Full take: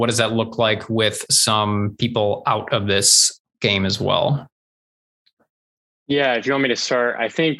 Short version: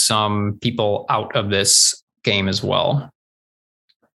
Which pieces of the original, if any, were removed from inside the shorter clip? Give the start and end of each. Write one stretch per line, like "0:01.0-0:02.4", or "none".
none